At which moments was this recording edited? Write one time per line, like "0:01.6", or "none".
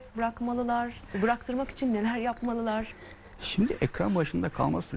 0:01.1